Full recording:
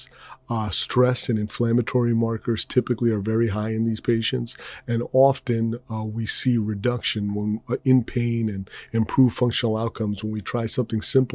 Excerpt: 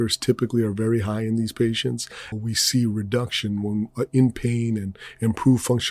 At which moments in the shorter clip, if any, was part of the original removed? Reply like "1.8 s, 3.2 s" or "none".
2.3 s